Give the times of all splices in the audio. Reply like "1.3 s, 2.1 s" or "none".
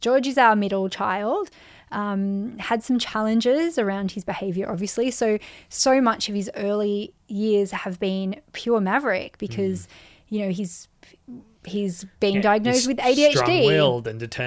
none